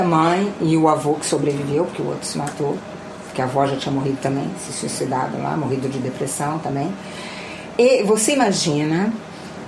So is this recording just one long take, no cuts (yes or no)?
no